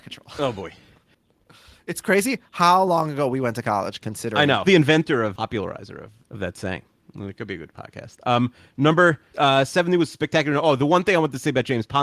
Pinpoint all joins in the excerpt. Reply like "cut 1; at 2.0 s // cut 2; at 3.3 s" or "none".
cut 1; at 4.6 s